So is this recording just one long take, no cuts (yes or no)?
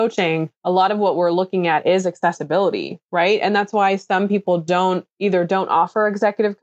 yes